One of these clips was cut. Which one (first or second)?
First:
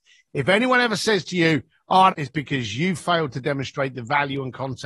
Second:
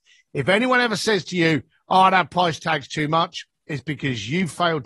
first